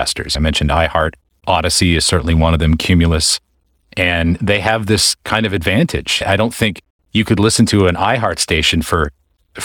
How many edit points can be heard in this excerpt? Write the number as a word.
zero